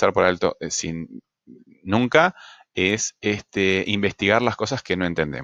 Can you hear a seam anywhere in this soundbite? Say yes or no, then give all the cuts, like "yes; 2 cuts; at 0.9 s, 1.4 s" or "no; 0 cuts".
no; 0 cuts